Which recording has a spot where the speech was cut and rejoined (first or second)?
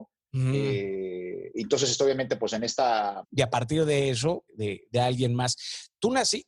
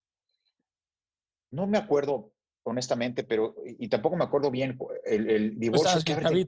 first